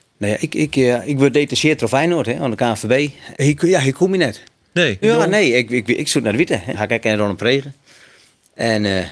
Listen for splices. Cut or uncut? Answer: cut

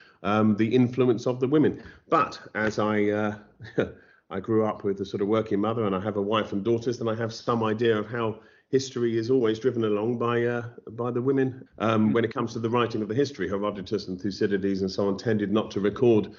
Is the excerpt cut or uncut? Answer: cut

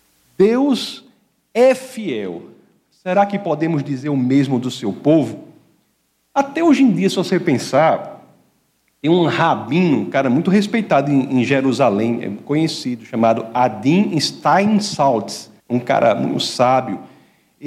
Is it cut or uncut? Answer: cut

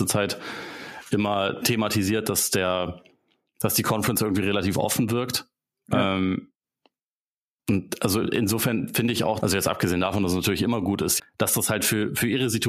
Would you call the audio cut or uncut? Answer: cut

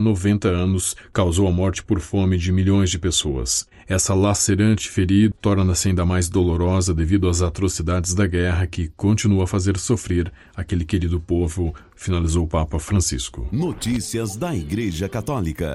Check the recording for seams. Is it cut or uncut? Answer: cut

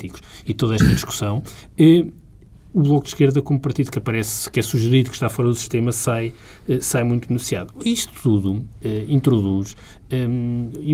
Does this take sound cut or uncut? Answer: uncut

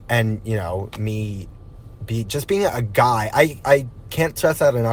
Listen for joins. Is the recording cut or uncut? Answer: uncut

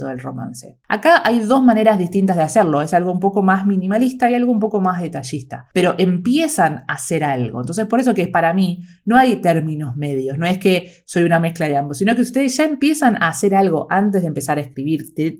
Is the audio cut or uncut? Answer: uncut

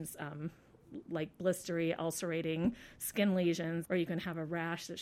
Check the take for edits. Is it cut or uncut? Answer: cut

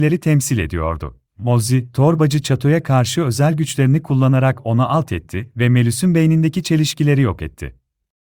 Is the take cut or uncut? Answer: cut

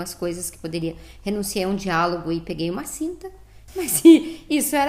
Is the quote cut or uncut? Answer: cut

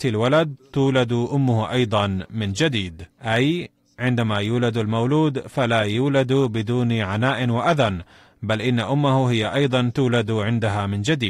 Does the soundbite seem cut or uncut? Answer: cut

